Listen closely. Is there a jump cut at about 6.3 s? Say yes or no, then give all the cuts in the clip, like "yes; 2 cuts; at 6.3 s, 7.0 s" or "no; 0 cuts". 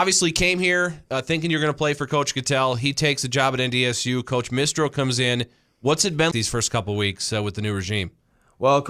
yes; 1 cut; at 6.3 s